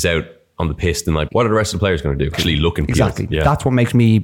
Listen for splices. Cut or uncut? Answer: cut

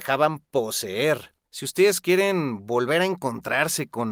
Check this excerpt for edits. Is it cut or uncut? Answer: cut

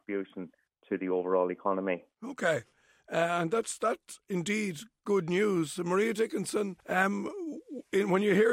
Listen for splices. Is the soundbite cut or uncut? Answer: cut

